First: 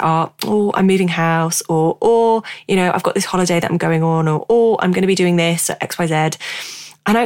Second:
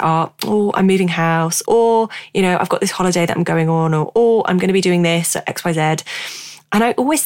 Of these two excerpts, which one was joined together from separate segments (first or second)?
second